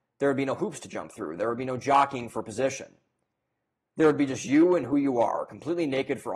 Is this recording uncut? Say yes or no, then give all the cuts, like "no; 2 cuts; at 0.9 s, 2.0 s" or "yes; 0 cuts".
yes; 0 cuts